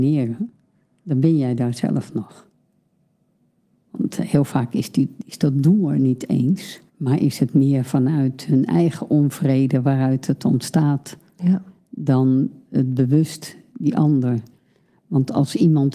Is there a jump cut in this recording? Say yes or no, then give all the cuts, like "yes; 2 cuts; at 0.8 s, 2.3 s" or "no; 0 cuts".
yes; 2 cuts; at 3.8 s, 6.9 s